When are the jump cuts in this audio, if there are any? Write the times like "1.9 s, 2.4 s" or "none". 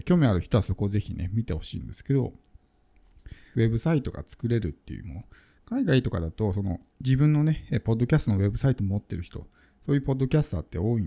3.5 s, 6.9 s

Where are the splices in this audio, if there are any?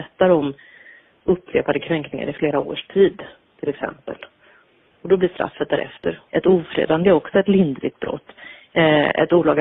6.3 s

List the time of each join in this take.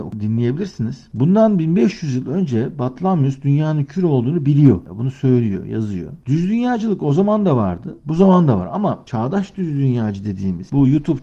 none

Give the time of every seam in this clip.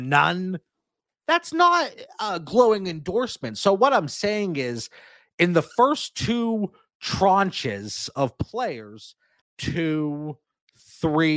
9.4 s

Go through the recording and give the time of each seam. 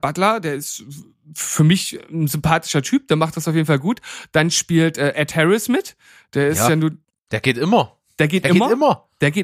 none

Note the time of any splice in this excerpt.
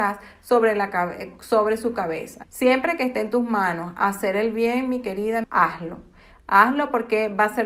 2.4 s, 5.4 s

